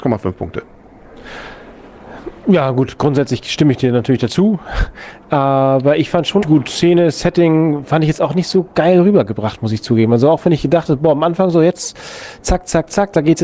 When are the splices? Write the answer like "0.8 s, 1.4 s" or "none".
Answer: 6.4 s